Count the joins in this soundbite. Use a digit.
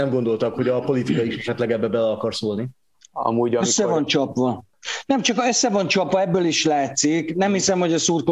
0